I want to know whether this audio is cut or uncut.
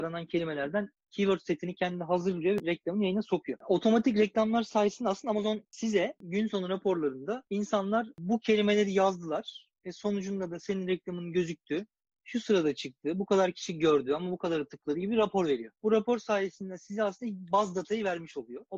uncut